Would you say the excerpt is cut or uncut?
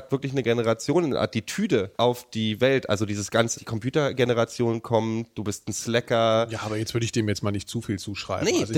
cut